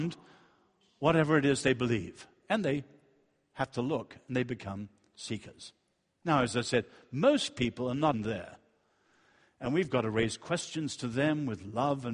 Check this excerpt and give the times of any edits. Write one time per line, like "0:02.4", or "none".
0:08.1